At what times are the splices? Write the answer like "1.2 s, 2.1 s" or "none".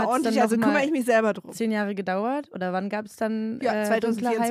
none